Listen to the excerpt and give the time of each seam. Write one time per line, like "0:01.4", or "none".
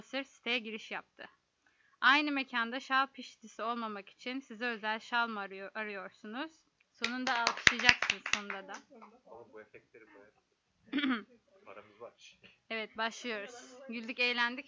0:06.8